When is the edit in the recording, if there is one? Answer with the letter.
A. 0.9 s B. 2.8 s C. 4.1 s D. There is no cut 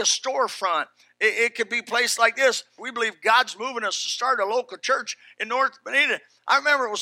B